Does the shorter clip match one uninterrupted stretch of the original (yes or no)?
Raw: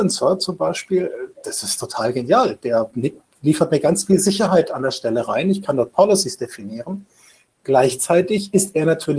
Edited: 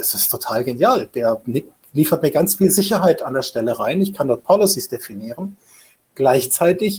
yes